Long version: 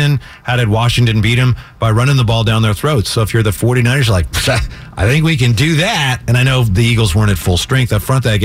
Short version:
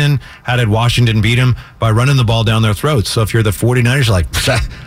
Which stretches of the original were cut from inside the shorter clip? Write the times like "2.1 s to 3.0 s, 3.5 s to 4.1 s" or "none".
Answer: none